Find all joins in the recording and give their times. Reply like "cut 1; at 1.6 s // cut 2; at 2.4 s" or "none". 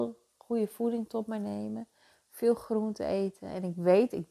none